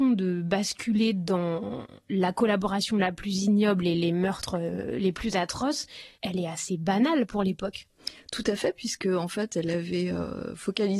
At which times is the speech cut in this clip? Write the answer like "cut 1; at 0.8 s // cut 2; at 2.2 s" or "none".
cut 1; at 6.1 s